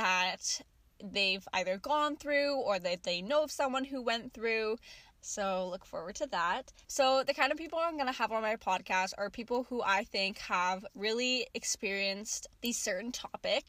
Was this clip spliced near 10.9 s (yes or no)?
no